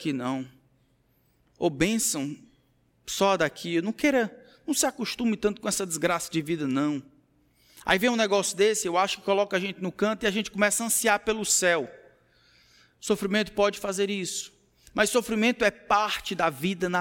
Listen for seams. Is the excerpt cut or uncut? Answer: uncut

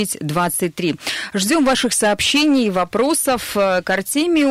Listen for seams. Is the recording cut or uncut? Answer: uncut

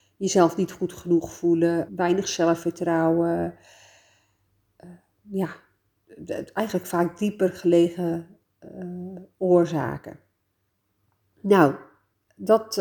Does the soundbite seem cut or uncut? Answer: cut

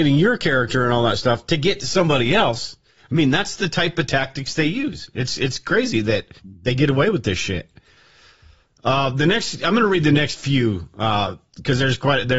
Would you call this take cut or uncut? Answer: cut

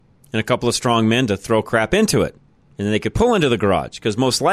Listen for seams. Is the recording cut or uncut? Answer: uncut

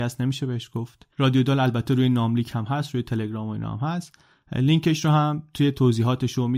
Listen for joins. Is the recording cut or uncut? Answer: cut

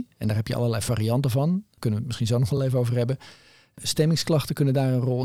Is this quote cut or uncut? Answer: uncut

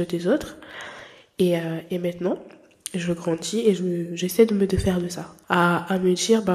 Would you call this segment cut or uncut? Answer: cut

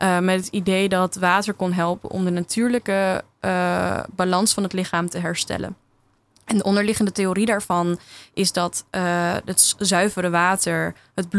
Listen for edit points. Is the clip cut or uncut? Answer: uncut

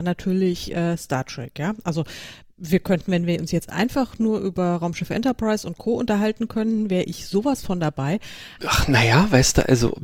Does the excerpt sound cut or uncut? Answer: cut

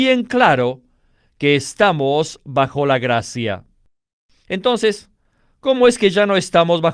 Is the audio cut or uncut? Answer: uncut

